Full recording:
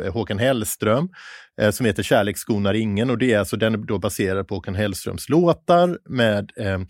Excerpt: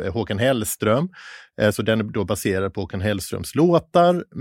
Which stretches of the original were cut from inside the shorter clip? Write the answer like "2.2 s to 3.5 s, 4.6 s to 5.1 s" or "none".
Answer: 1.7 s to 3.5 s